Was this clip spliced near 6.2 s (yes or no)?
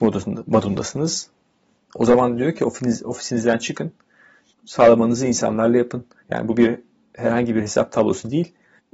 yes